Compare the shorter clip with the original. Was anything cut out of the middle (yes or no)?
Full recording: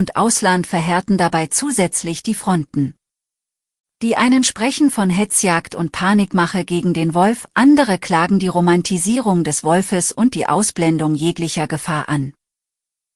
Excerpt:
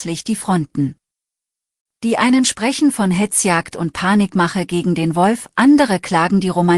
no